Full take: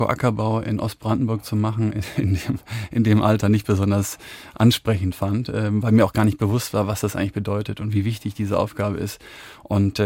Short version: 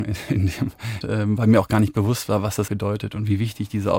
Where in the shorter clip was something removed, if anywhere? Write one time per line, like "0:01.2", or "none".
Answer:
0:01.0
0:02.7